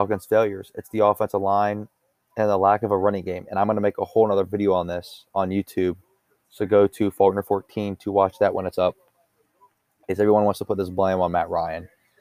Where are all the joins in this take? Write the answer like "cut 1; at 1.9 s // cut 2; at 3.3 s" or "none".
none